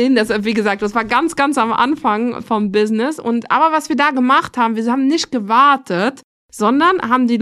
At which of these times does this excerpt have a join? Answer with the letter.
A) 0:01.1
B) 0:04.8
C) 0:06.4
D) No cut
D